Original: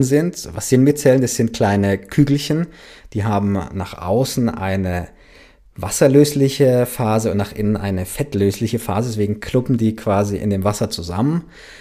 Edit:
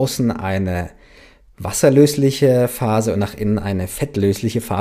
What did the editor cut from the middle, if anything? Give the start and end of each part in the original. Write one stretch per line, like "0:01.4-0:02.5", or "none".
none